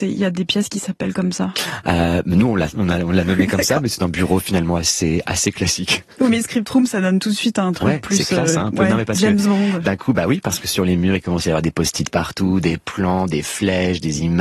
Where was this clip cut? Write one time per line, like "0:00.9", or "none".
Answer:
none